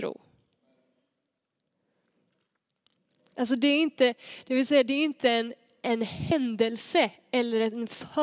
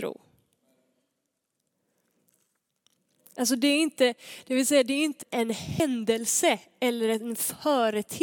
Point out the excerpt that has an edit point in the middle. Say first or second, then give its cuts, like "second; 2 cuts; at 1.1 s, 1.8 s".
second; 1 cut; at 5.2 s